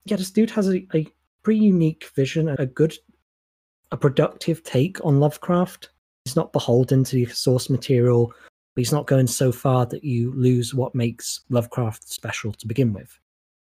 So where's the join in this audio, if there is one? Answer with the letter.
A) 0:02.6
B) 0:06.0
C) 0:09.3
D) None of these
A